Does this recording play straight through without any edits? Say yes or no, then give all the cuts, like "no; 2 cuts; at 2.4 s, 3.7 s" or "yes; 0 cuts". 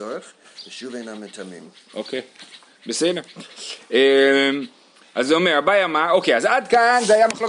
yes; 0 cuts